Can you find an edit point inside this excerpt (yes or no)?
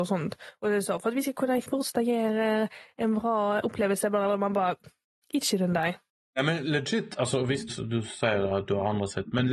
yes